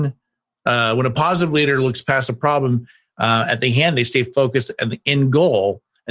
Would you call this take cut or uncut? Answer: uncut